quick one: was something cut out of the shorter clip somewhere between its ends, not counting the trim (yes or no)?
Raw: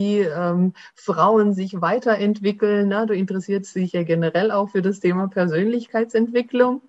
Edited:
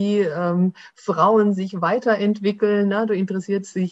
no